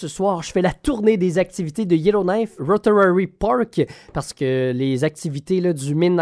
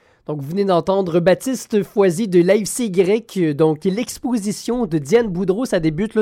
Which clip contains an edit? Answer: first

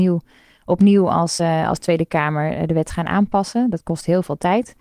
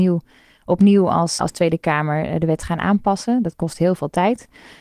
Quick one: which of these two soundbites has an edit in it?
second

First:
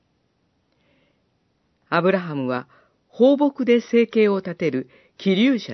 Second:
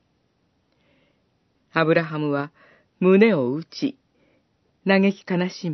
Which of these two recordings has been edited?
second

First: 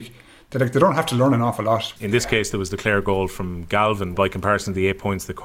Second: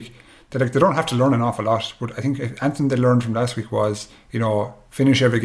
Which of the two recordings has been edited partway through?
first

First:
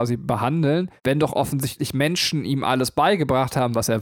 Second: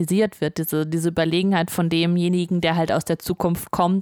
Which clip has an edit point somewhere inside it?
first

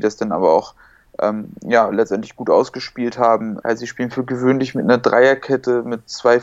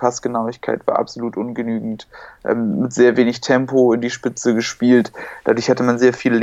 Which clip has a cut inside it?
first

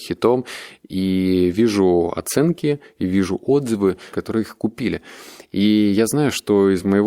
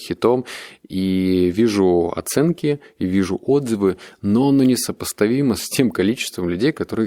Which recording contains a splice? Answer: first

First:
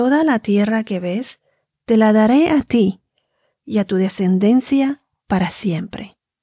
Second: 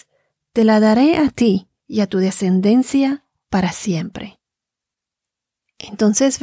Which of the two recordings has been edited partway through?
second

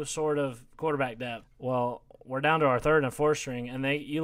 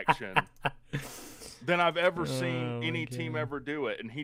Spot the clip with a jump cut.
first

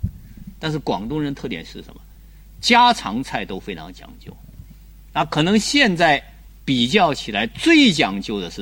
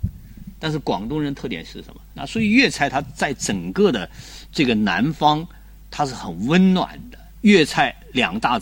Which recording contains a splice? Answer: second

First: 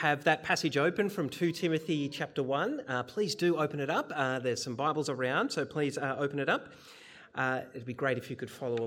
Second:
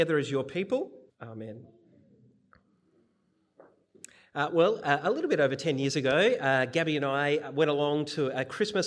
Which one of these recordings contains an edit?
second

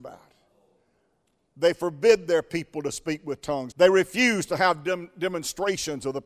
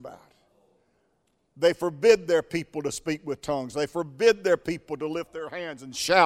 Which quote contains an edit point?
first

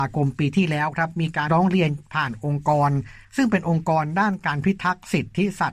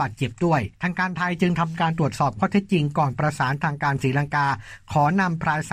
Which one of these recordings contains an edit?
first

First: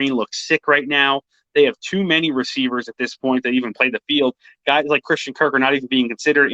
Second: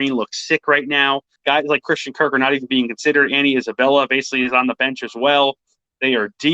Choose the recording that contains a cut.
second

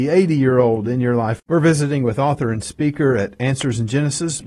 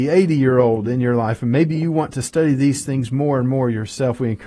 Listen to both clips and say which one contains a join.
first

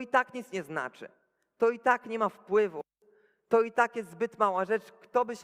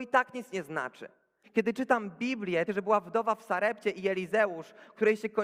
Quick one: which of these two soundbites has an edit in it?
second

